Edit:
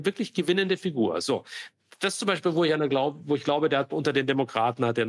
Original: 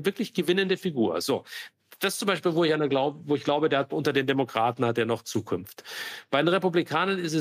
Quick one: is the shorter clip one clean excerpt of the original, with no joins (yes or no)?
yes